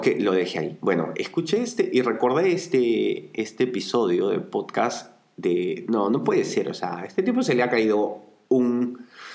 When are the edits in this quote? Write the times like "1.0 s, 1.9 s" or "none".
5.9 s